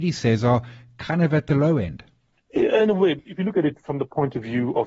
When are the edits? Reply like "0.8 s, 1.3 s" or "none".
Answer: none

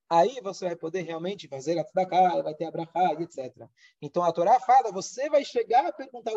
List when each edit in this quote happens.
4.0 s

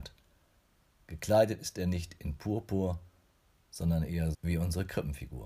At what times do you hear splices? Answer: 4.3 s

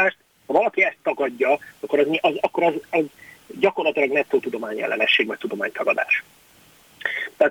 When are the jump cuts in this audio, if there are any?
none

